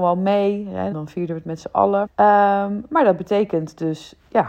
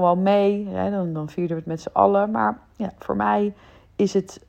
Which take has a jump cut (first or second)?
first